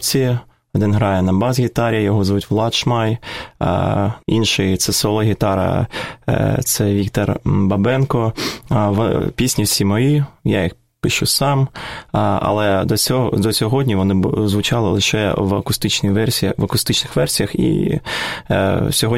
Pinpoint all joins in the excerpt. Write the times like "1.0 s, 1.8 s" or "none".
4.2 s